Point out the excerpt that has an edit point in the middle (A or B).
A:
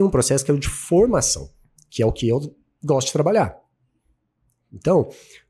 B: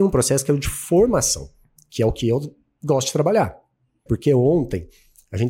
B